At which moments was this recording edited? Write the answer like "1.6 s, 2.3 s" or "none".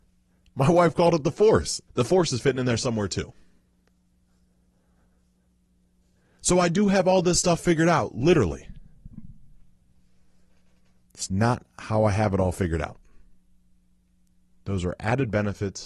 1.9 s, 11.1 s